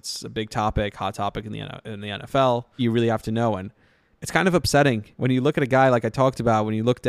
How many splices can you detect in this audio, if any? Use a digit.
2